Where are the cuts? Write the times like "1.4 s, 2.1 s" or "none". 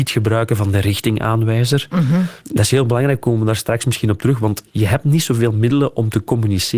2.4 s